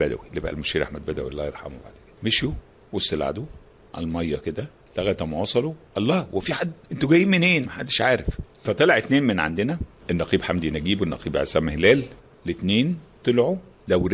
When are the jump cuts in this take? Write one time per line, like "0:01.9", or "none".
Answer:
0:07.7